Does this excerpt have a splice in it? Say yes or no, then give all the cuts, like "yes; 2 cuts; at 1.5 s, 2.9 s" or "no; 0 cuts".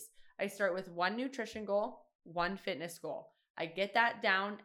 no; 0 cuts